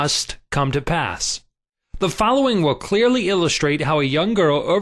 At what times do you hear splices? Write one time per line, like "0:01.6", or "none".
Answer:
none